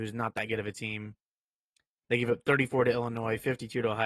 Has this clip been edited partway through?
no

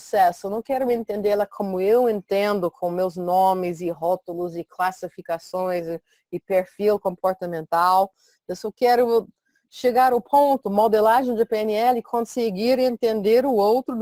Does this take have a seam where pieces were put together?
no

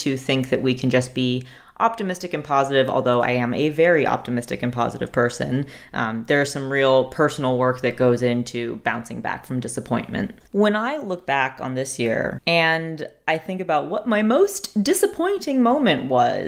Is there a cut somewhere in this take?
yes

